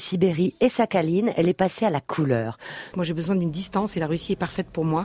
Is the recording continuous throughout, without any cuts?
no; 1 cut; at 2.9 s

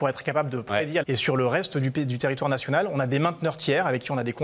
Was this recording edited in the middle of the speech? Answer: yes; 1 cut; at 1.0 s

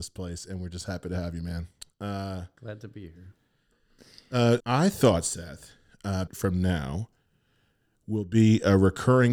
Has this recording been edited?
yes; 2 cuts; at 4.6 s, 6.3 s

